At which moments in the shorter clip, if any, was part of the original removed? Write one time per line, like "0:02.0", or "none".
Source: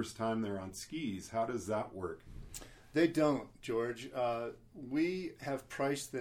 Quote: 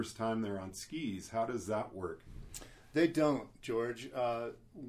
none